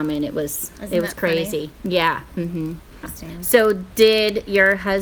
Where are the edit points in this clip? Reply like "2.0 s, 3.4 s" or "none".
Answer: 3.0 s